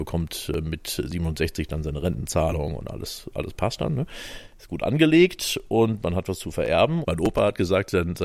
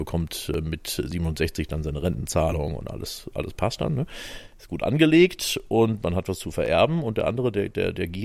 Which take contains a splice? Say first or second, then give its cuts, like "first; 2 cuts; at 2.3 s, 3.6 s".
first; 1 cut; at 7.0 s